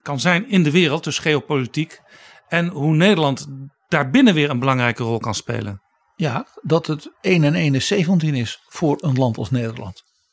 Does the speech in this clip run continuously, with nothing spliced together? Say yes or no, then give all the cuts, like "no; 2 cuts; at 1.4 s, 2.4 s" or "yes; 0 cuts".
yes; 0 cuts